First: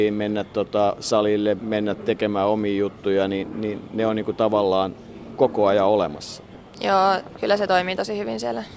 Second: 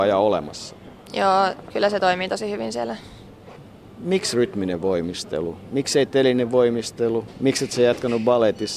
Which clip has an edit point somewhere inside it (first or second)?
first